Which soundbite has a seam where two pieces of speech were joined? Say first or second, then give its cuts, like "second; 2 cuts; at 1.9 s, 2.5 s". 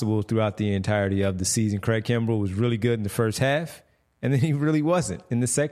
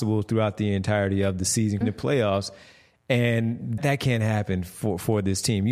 second; 2 cuts; at 1.8 s, 3.8 s